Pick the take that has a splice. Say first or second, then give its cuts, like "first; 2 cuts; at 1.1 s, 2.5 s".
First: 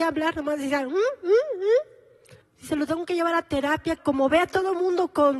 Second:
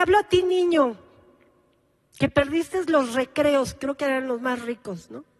first; 2 cuts; at 2.4 s, 4.0 s